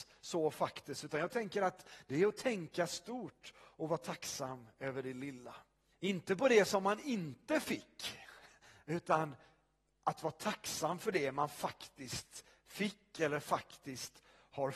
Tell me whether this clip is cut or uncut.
cut